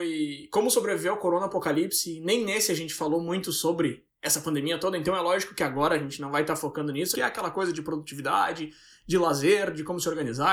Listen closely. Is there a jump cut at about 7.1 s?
yes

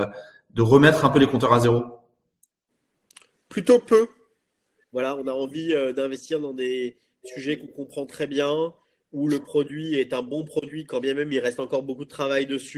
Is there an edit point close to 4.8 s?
yes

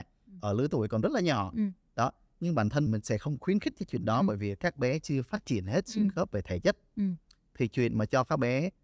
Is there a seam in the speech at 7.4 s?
no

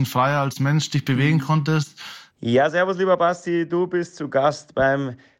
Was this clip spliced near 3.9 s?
no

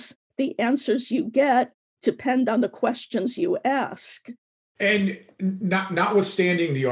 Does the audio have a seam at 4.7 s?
yes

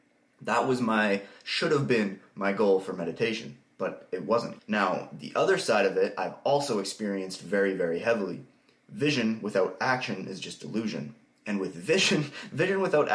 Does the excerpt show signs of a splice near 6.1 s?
no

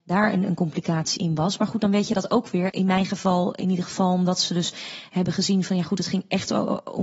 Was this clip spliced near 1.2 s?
yes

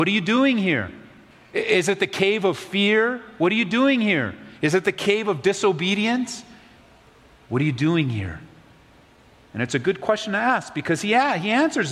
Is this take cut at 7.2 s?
no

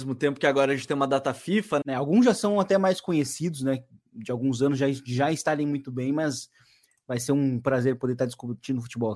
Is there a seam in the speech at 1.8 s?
yes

